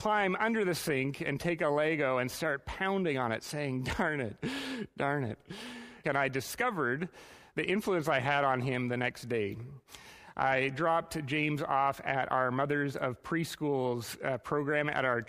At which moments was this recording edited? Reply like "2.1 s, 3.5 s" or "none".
6.0 s